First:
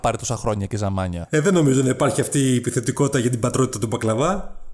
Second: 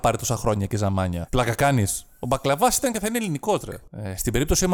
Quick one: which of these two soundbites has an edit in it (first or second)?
second